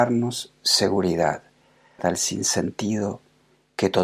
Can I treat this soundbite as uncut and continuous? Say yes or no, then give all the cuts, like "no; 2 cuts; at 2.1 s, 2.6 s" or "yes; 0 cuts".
no; 1 cut; at 2.0 s